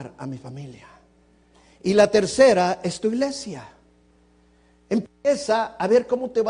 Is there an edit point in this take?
no; 0 cuts

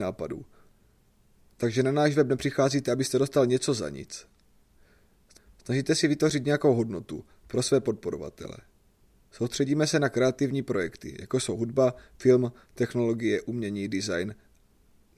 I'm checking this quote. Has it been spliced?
no; 0 cuts

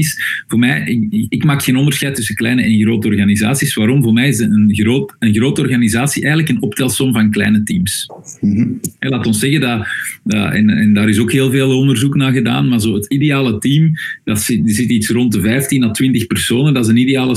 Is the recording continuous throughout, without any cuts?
yes; 0 cuts

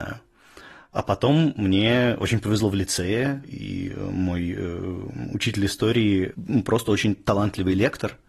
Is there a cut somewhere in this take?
no; 0 cuts

